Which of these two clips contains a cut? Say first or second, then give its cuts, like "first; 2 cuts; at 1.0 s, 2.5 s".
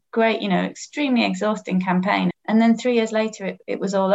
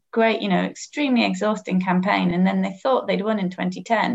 first; 1 cut; at 2.3 s